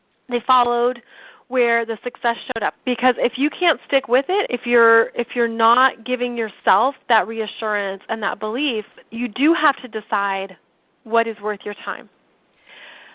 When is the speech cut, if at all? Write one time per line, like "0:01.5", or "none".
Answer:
0:02.7
0:04.4
0:09.0